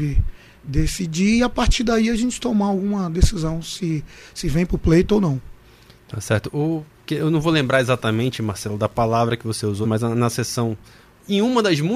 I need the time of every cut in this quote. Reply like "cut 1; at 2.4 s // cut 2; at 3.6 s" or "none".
cut 1; at 9.8 s